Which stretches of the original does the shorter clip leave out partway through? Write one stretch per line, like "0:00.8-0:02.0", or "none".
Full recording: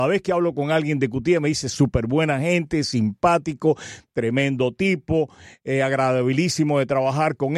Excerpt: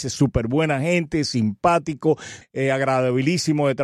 0:04.0-0:05.5

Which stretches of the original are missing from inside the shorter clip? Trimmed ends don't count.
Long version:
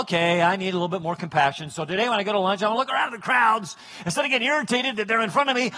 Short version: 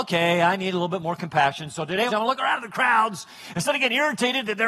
0:02.1-0:02.6

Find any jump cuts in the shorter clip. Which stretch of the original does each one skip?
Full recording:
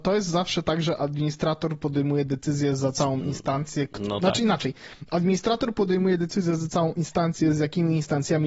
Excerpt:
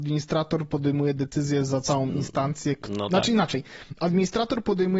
none

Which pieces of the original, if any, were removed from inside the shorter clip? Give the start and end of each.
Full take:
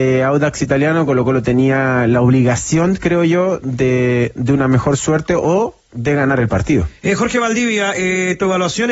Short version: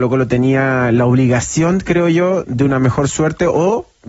0:03.6-0:04.3

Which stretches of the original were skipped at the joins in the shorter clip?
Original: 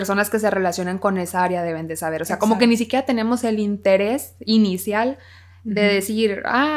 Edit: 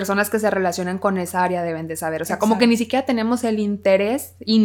none

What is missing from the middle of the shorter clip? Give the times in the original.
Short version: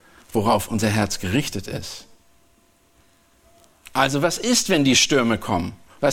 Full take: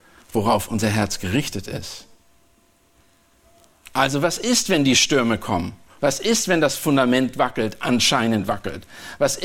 none

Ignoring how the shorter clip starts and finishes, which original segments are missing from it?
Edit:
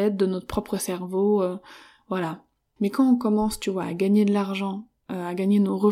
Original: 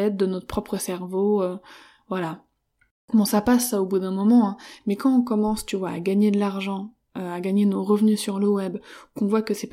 0:02.8-0:04.8

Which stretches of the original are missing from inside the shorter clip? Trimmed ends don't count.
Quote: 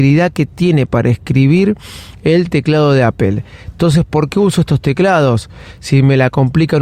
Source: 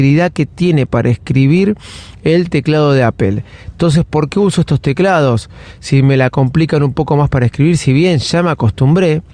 none

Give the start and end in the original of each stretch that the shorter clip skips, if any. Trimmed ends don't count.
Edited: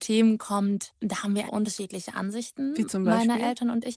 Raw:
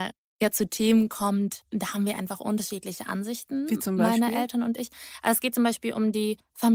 0:02.2-0:02.4

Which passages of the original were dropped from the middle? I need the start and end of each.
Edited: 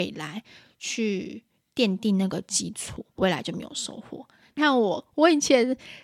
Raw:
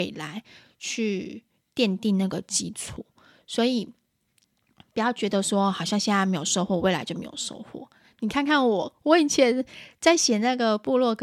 0:03.2-0:06.8
0:08.2-0:08.5

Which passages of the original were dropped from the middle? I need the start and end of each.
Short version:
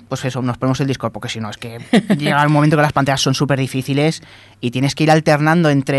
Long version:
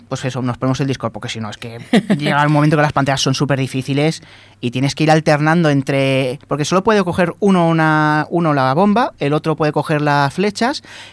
none

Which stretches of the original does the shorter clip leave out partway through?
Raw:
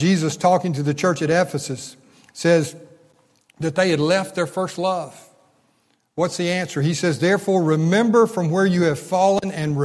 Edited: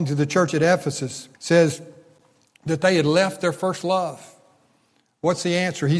0:02.0-0:02.3

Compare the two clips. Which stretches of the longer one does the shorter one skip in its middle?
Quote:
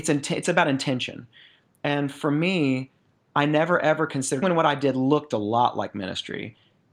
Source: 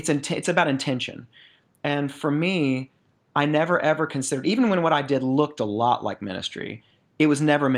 0:04.4-0:04.7

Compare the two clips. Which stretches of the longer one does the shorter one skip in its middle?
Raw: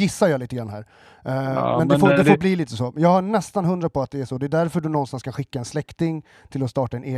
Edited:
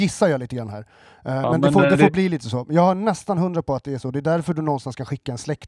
0:01.4-0:01.7

